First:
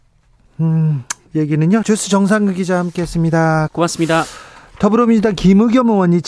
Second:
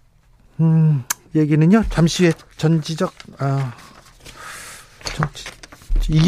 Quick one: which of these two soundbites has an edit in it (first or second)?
first